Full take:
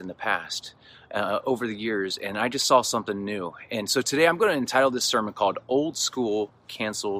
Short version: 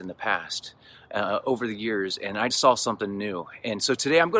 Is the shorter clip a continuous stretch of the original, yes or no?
no